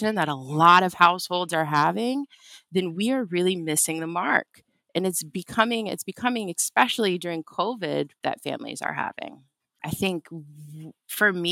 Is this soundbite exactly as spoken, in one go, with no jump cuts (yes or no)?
no